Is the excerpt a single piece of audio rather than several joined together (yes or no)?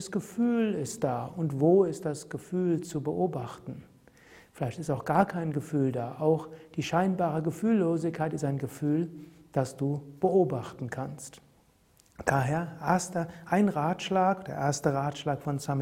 yes